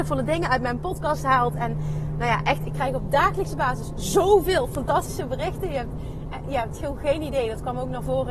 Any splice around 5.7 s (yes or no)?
no